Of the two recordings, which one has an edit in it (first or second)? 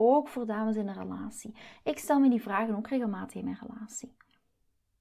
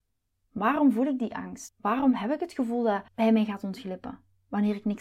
second